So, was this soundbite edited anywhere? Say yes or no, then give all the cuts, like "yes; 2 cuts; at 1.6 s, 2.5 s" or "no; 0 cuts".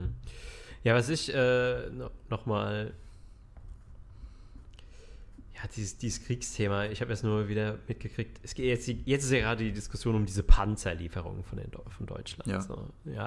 no; 0 cuts